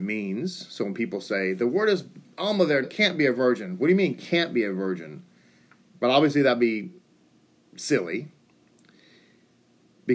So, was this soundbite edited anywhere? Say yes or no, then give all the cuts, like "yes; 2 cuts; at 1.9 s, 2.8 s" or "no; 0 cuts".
yes; 2 cuts; at 2.8 s, 5.9 s